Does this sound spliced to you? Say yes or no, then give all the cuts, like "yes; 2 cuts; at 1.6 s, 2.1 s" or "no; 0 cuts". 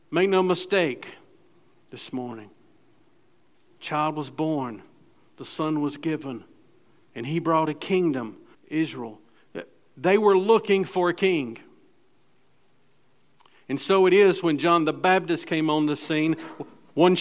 yes; 1 cut; at 8.5 s